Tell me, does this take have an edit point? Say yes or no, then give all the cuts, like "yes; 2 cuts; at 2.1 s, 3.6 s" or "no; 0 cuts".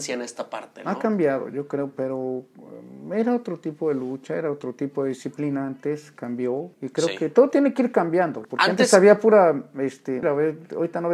yes; 3 cuts; at 6.7 s, 8.4 s, 10.2 s